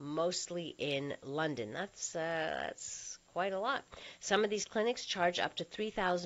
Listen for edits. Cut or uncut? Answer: uncut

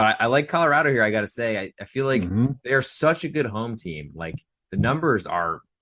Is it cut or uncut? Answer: uncut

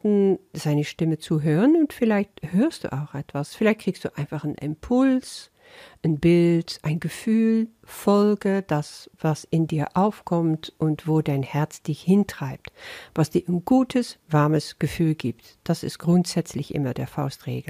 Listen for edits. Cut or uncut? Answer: uncut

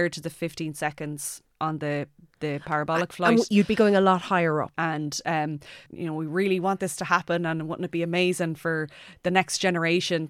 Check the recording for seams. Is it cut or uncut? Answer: cut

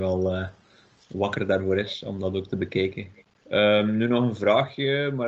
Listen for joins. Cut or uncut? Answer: cut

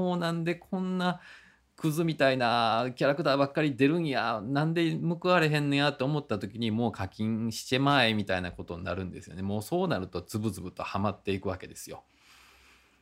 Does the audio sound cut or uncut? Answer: uncut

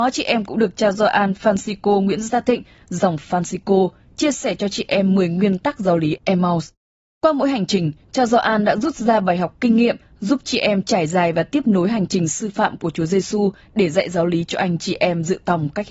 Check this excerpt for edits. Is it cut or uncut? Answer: uncut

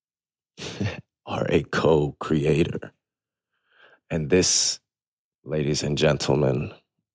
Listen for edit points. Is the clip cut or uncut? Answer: uncut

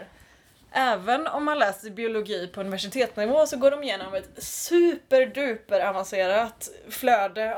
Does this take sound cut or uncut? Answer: uncut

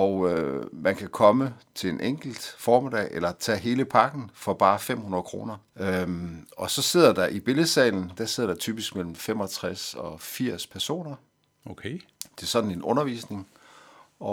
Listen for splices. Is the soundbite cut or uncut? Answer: cut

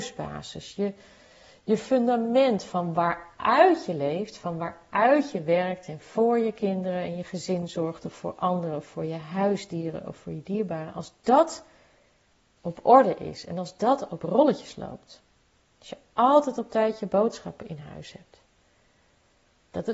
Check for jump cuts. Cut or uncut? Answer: uncut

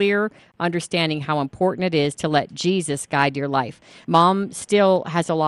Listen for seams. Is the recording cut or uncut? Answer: cut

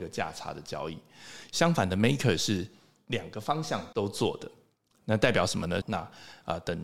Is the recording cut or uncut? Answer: cut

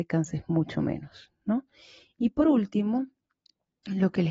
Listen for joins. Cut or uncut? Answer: uncut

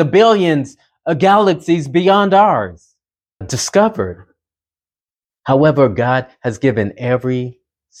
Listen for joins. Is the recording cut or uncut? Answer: cut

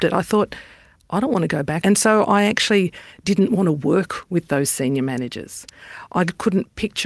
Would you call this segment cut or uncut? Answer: cut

